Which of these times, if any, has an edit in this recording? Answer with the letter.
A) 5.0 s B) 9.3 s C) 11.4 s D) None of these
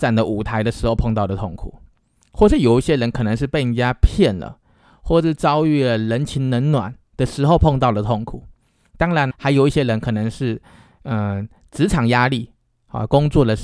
B